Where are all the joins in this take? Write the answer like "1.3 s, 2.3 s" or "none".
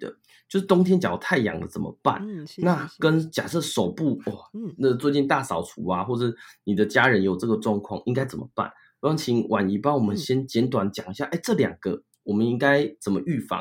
none

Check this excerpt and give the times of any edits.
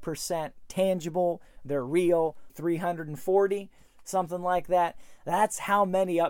2.5 s

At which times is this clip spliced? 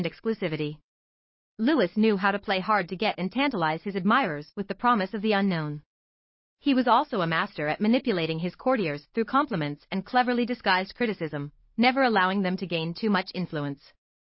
none

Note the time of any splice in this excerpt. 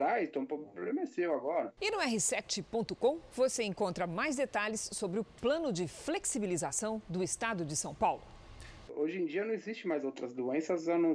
1.8 s, 8.9 s

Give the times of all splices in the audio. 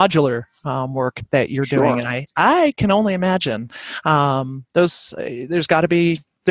none

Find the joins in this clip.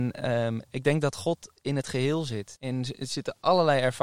2.6 s

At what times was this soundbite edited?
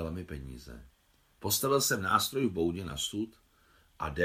1.3 s

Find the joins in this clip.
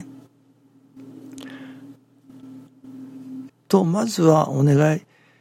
3.5 s

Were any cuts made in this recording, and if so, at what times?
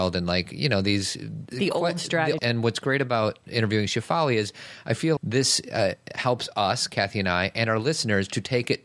2.4 s, 5.2 s

